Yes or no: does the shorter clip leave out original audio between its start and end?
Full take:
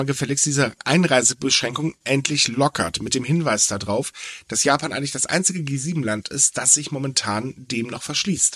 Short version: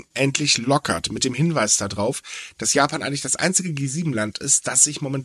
no